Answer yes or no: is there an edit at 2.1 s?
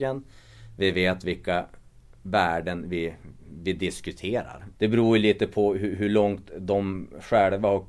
no